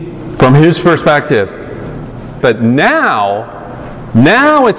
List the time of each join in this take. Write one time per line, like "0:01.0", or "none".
0:02.4